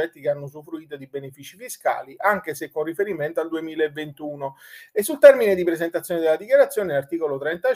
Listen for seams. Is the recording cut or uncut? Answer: uncut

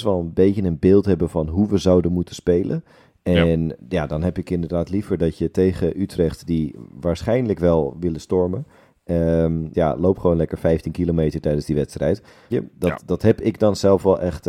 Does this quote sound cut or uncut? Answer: cut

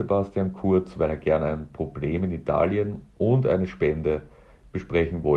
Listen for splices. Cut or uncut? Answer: uncut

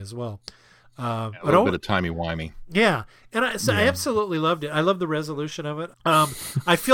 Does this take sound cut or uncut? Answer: cut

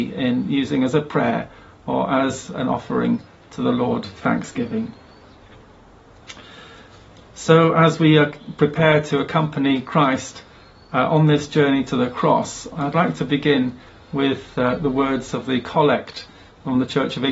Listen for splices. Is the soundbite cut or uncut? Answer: uncut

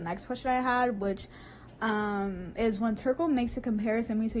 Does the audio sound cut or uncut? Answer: uncut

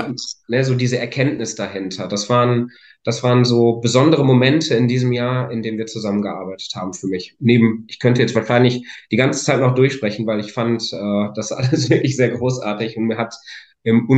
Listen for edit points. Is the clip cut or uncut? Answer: uncut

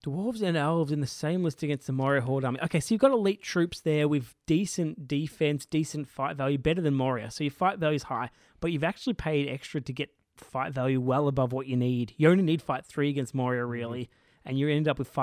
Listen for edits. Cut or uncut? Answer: uncut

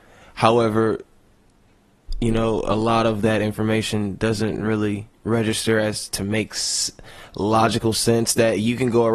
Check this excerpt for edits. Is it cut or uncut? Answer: uncut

